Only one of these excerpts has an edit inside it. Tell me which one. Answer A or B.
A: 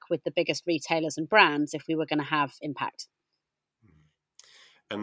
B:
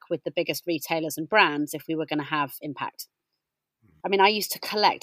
B